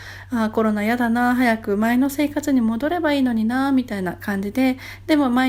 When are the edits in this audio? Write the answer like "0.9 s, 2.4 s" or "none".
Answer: none

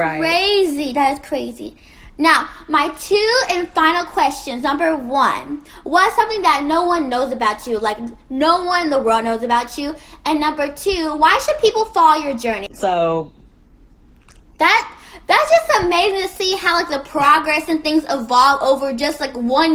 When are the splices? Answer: 12.7 s

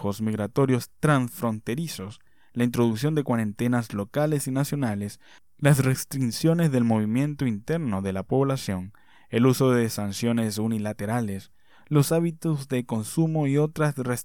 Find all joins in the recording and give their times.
none

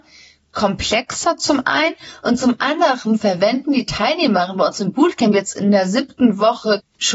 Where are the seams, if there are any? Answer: none

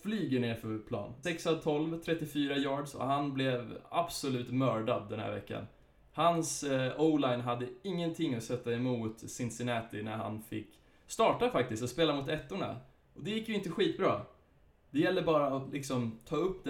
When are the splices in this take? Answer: 1.2 s, 14.9 s

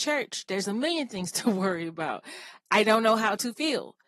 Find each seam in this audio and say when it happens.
none

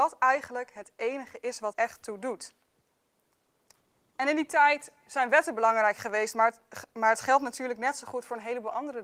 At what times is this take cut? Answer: 1.7 s

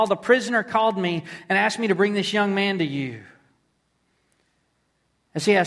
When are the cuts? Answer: none

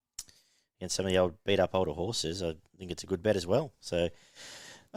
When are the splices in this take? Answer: none

